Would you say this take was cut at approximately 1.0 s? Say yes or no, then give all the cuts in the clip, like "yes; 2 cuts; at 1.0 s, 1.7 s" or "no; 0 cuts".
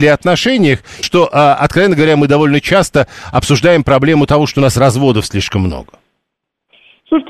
yes; 1 cut; at 1.0 s